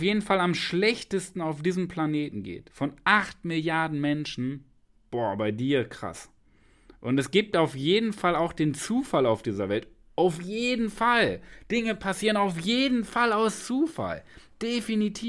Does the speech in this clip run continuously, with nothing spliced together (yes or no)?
yes